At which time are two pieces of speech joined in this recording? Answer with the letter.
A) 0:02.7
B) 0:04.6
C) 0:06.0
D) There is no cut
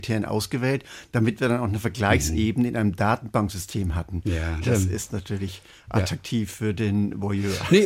B